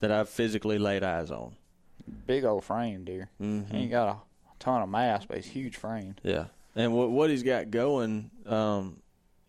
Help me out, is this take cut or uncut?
uncut